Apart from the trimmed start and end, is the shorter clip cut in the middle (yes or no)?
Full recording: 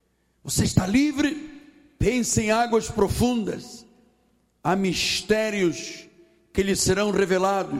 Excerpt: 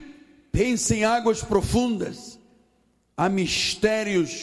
no